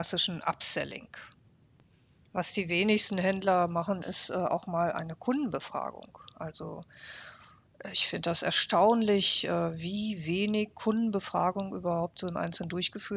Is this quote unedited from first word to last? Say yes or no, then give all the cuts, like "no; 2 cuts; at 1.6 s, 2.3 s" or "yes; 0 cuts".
yes; 0 cuts